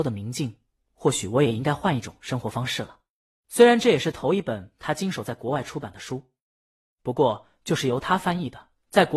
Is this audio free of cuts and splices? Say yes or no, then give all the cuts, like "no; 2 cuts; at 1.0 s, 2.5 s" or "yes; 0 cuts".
no; 1 cut; at 3.3 s